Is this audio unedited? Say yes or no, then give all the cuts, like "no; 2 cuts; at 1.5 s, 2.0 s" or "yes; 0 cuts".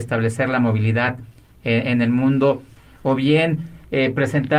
yes; 0 cuts